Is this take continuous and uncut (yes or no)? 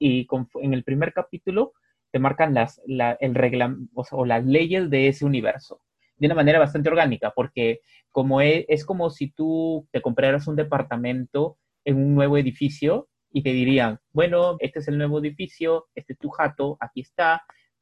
no